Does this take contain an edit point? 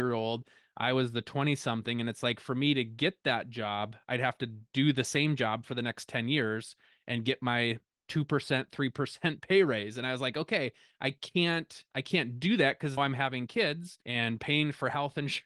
yes; 2 cuts; at 13.0 s, 14.0 s

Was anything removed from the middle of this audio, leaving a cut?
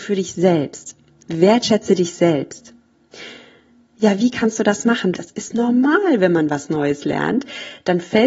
yes; 1 cut; at 5.1 s

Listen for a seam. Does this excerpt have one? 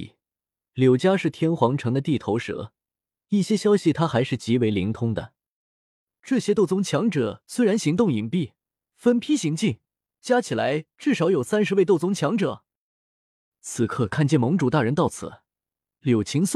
yes; 2 cuts; at 10.1 s, 13.5 s

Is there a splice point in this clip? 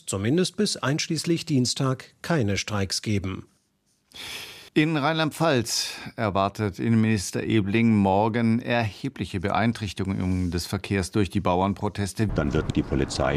yes; 2 cuts; at 4.7 s, 12.3 s

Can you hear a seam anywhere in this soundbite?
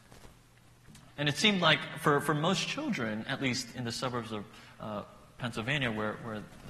yes; 2 cuts; at 1.1 s, 3.7 s

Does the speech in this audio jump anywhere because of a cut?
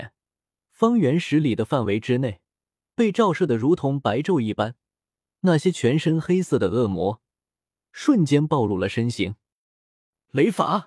no; 0 cuts

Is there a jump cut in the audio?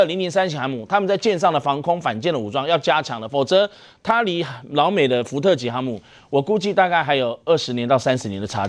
no; 0 cuts

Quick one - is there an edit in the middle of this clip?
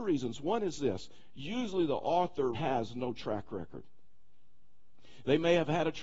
yes; 1 cut; at 2.5 s

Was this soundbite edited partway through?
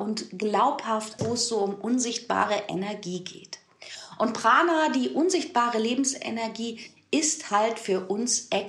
yes; 1 cut; at 1.2 s

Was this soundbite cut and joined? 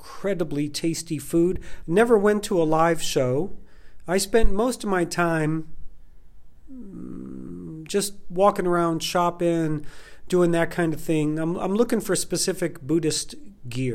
yes; 1 cut; at 1.8 s

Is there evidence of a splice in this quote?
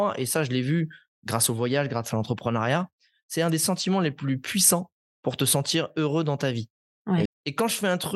yes; 1 cut; at 7.3 s

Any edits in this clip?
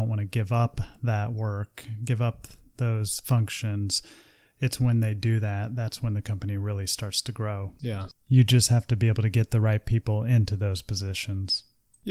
no; 0 cuts

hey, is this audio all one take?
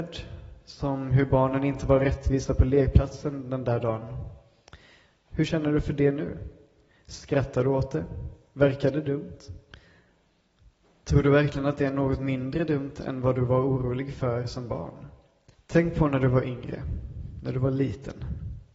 no; 2 cuts; at 11.0 s, 15.5 s

